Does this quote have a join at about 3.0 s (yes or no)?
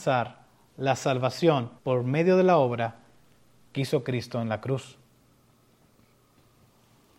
no